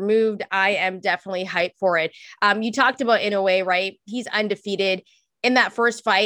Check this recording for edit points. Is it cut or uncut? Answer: uncut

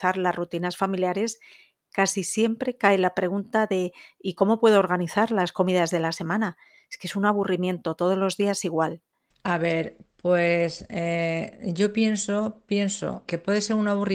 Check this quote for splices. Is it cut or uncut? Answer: cut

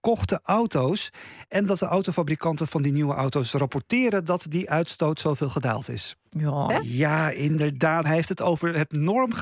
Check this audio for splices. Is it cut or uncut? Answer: cut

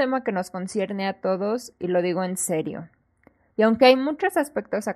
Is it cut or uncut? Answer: cut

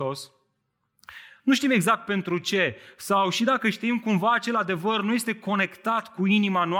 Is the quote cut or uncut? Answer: cut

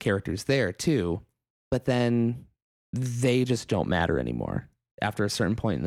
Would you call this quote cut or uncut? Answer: uncut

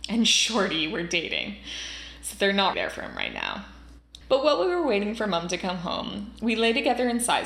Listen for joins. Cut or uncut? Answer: cut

